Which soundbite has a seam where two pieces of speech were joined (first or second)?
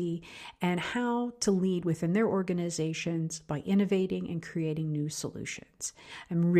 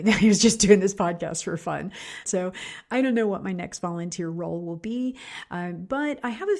second